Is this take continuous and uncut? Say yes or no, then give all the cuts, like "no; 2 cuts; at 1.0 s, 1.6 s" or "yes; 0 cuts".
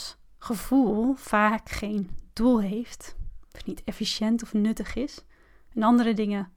yes; 0 cuts